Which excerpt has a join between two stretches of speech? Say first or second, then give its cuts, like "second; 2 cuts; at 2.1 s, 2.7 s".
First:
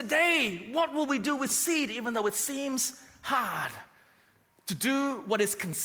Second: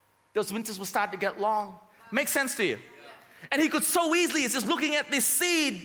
second; 2 cuts; at 2.0 s, 3.5 s